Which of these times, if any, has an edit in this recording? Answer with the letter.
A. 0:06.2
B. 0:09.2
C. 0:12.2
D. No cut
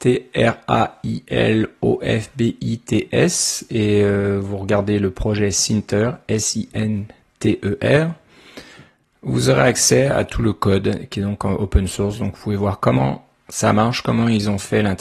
D